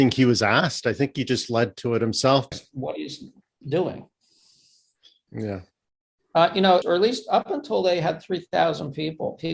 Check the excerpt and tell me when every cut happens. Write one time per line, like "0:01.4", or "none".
0:02.5
0:05.3
0:06.8